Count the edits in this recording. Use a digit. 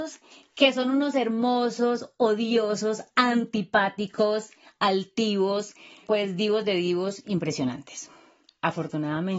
1